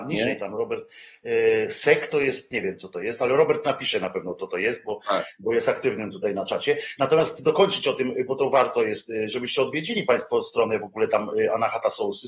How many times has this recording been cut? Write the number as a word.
zero